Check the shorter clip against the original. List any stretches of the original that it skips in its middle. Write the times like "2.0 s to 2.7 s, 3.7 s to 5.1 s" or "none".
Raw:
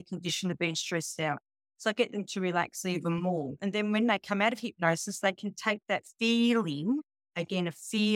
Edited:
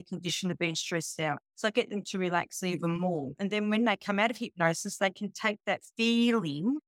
1.5 s to 1.7 s